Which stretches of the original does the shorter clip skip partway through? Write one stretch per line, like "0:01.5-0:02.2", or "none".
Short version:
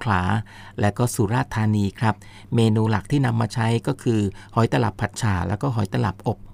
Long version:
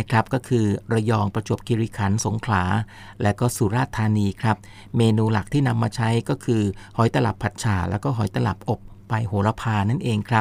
none